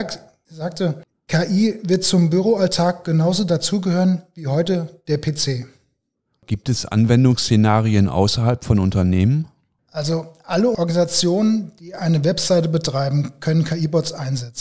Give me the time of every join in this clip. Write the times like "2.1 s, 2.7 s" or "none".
none